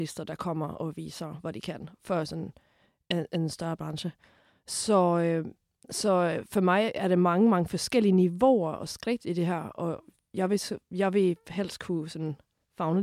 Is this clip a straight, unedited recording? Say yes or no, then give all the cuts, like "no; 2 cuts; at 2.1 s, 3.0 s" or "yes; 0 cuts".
yes; 0 cuts